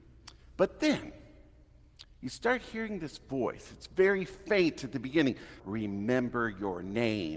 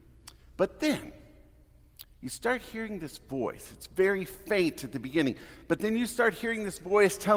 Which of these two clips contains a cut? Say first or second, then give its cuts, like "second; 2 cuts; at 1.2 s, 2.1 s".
first; 1 cut; at 5.6 s